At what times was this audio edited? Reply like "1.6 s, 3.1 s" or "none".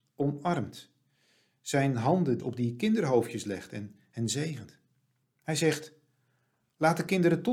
2.4 s, 5.2 s